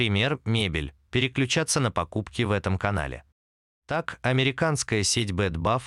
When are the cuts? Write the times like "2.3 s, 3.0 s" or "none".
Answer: 3.7 s

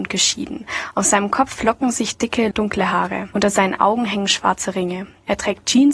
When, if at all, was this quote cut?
3.3 s

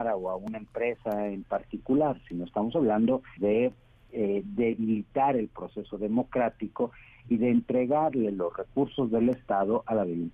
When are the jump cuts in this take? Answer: 3.4 s

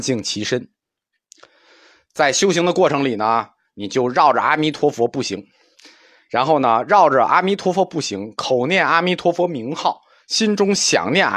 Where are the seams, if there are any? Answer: none

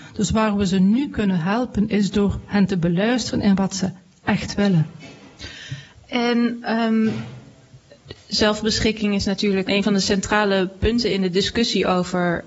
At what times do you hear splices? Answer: 9.6 s

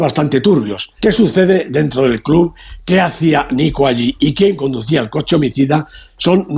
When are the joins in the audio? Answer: 1.0 s

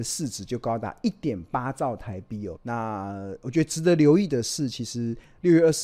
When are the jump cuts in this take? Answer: 2.6 s

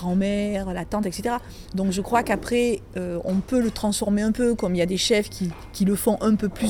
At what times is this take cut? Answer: none

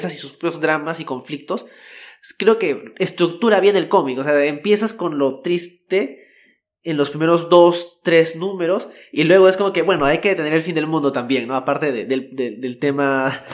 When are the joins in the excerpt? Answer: none

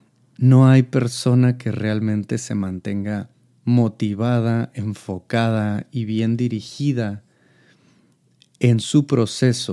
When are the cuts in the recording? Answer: none

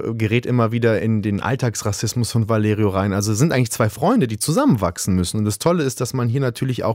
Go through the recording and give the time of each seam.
none

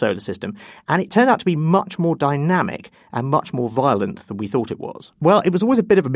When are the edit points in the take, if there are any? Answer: 5.1 s

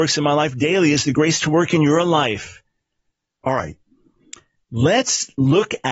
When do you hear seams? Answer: 3.4 s

